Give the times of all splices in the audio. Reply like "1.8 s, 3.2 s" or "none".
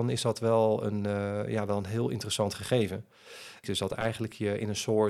3.6 s